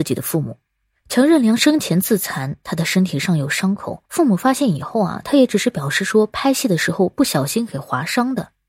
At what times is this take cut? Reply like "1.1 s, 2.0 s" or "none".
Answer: 4.0 s